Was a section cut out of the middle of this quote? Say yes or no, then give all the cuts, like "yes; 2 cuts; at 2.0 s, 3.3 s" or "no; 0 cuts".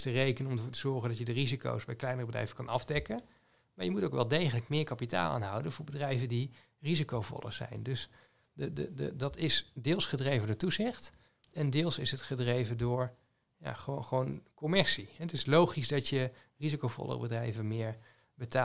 no; 0 cuts